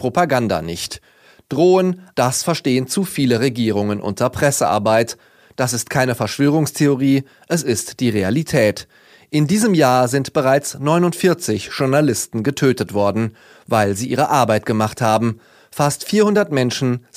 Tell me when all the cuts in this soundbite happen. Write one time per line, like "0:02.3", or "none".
0:02.1